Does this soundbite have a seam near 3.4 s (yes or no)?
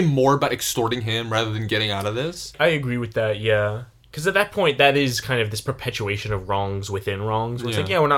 no